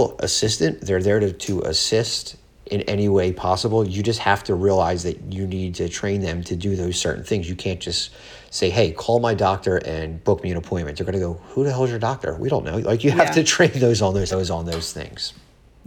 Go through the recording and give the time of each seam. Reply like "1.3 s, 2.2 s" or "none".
14.3 s